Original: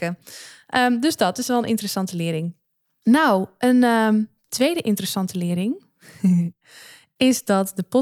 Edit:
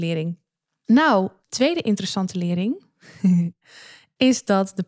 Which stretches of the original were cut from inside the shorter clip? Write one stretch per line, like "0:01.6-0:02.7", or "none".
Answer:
0:03.6-0:04.4